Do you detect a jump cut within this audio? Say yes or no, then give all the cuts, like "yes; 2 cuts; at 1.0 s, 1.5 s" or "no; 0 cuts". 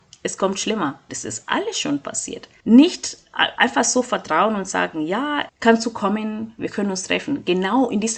yes; 3 cuts; at 1.1 s, 2.6 s, 5.5 s